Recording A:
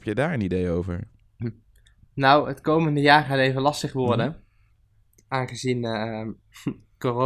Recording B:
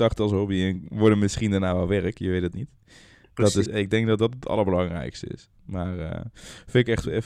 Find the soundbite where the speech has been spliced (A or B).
B